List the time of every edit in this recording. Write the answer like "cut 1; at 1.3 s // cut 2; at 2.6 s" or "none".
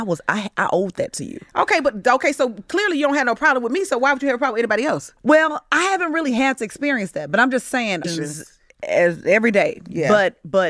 cut 1; at 5.2 s // cut 2; at 8.0 s